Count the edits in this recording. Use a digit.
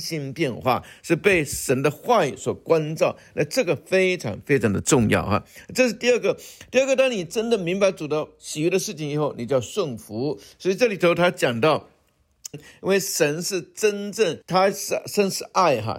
2